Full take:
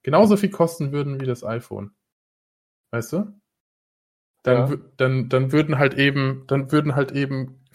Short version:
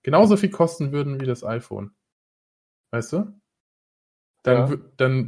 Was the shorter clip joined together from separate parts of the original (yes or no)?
no